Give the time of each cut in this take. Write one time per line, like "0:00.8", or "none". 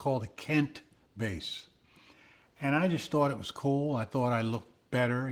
none